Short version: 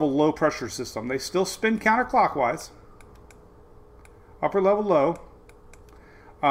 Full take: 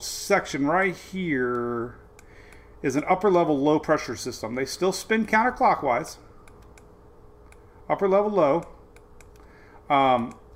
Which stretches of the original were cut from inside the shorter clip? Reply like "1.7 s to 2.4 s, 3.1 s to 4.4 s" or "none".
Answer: none